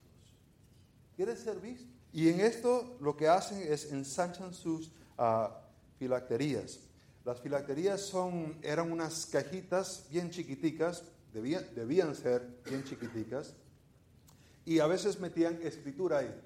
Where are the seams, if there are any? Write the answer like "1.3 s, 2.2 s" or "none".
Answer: 2.0 s